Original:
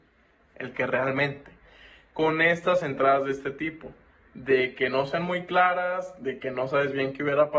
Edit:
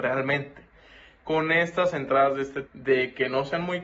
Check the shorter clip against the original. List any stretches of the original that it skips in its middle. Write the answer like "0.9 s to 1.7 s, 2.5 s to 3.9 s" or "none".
3.5 s to 4.2 s